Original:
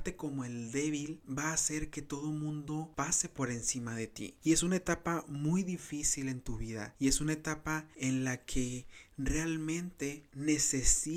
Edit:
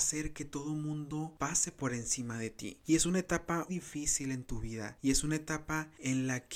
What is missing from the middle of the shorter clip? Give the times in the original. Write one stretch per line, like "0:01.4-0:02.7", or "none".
0:05.3-0:05.7